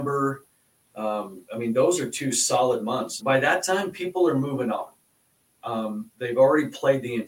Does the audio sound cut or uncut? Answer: cut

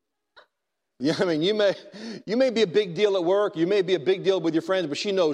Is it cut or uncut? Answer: uncut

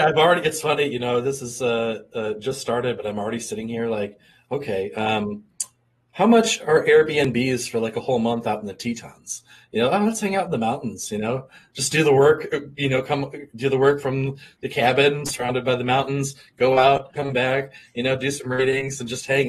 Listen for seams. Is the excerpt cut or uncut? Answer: cut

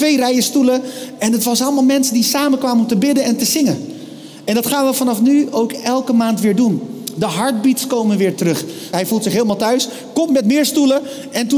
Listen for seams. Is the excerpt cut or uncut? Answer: cut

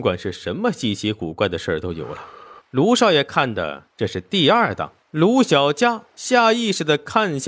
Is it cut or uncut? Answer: cut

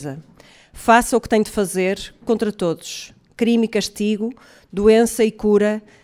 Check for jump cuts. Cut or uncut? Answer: cut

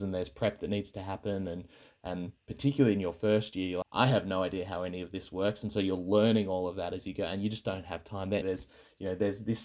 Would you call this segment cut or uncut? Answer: cut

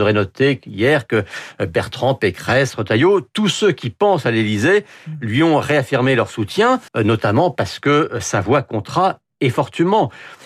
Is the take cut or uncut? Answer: cut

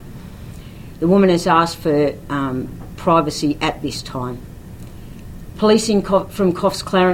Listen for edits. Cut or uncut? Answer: uncut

